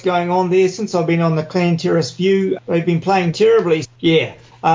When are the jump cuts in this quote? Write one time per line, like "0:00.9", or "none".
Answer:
0:03.8